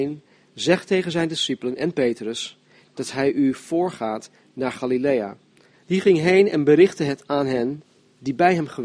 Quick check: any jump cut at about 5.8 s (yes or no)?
yes